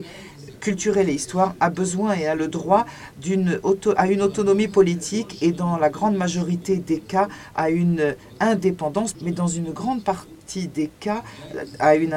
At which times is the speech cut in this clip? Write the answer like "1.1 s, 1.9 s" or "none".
9.1 s